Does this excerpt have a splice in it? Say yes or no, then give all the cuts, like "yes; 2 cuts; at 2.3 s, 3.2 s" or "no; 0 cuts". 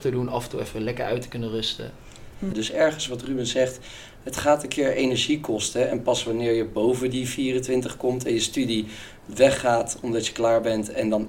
yes; 1 cut; at 2.5 s